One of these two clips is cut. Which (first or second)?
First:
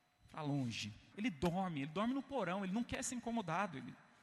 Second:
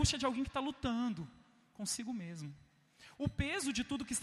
first